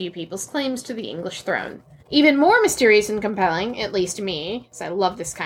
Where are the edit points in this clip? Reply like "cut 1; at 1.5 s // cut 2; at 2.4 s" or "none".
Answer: cut 1; at 2.0 s